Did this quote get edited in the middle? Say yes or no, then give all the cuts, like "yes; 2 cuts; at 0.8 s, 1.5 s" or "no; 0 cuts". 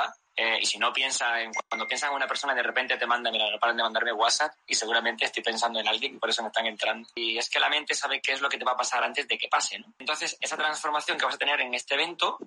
no; 0 cuts